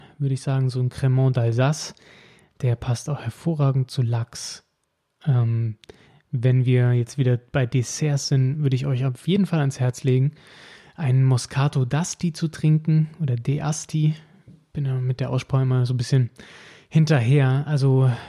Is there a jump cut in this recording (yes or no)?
no